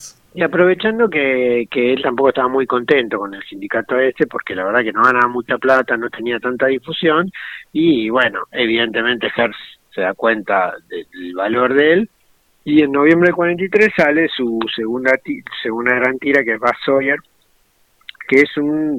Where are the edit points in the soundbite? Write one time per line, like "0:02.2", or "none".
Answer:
none